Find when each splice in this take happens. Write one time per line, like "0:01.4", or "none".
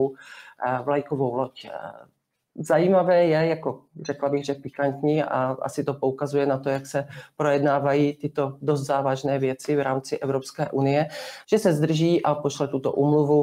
0:11.4